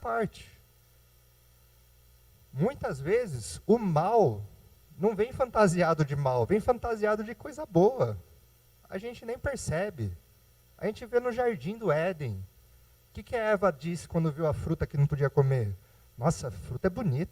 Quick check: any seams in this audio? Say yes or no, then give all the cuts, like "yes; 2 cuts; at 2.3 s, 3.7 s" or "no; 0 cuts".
no; 0 cuts